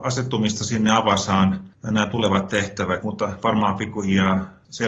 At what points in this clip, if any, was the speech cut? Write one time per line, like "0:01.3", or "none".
0:03.0